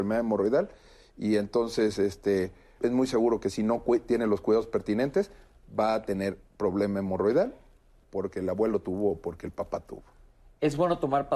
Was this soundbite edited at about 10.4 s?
no; 1 cut; at 2.8 s

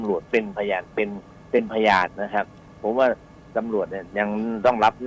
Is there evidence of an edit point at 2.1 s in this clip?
yes; 1 cut; at 2.1 s

